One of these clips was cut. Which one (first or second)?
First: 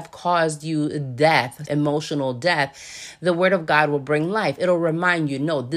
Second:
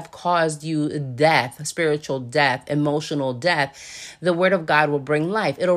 first